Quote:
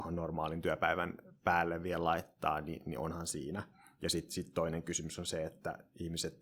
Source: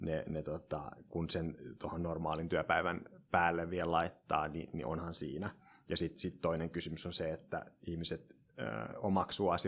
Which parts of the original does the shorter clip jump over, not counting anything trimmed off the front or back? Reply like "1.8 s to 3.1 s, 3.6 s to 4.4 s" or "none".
none